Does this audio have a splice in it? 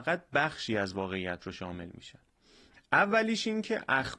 yes; 1 cut; at 2.7 s

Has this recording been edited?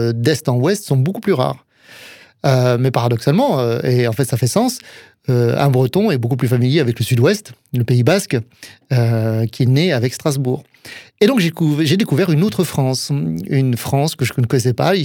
no; 0 cuts

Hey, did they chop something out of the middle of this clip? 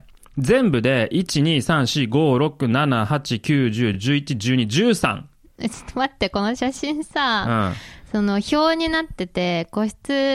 no; 0 cuts

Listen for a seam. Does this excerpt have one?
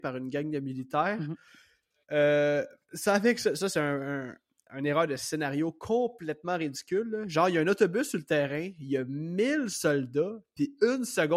no; 0 cuts

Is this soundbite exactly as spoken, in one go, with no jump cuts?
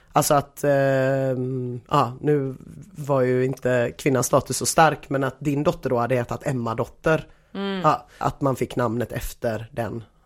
no; 1 cut; at 8.2 s

